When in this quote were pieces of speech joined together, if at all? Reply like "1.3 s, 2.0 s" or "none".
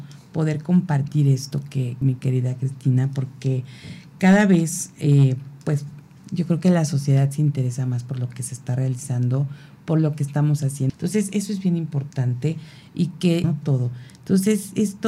2.0 s, 10.9 s, 13.4 s